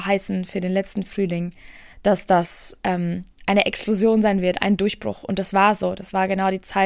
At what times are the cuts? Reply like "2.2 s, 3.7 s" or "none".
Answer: none